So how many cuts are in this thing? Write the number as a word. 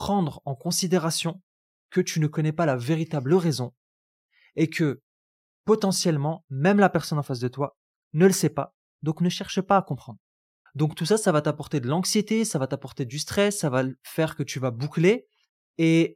one